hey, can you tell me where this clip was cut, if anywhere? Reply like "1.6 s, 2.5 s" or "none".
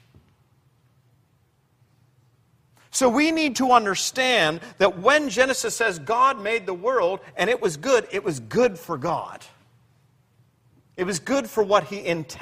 none